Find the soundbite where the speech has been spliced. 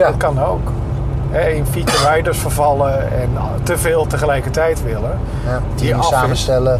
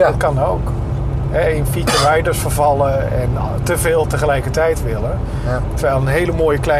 first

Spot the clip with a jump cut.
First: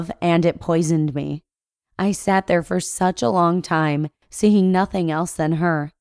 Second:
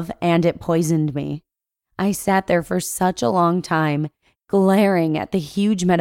first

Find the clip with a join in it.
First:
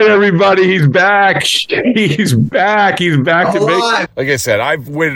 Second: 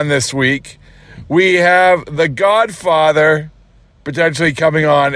first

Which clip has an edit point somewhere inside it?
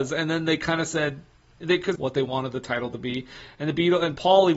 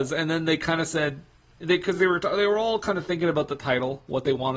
first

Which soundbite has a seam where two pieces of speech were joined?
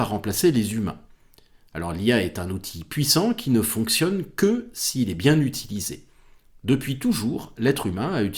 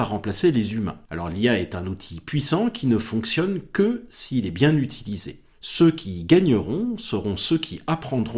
second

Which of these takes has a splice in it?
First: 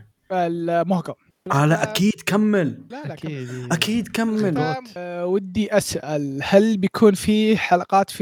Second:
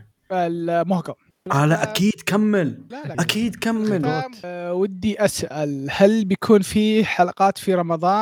second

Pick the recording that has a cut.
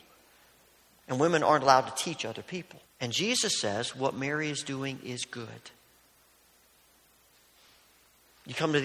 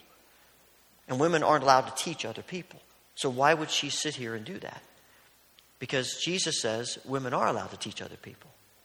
first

